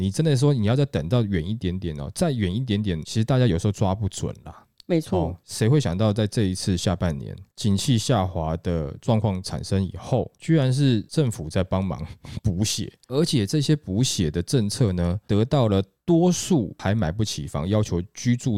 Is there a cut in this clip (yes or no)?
no